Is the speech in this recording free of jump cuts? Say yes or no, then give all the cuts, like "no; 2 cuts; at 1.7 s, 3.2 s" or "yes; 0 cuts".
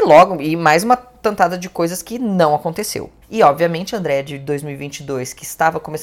no; 1 cut; at 3.2 s